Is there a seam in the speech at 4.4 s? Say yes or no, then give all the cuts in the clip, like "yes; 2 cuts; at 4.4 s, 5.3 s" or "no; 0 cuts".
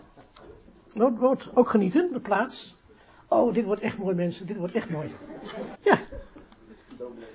no; 2 cuts; at 2.1 s, 5.7 s